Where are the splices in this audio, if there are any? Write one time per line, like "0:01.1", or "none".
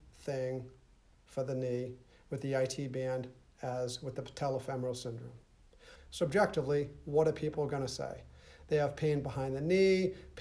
0:06.0